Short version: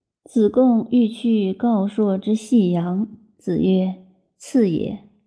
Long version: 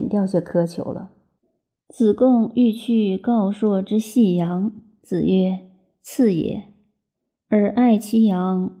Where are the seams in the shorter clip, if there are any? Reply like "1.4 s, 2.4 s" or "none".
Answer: none